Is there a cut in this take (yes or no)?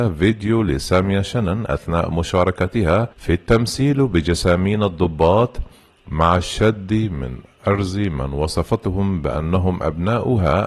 yes